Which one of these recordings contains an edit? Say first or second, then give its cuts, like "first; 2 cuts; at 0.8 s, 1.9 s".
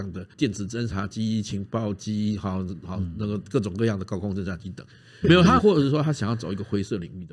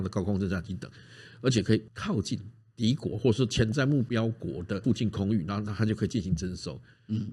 first; 1 cut; at 5.2 s